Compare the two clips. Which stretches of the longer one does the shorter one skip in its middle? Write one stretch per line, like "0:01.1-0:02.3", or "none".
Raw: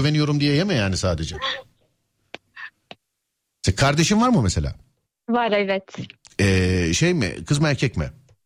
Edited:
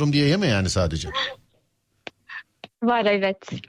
0:03.0-0:05.2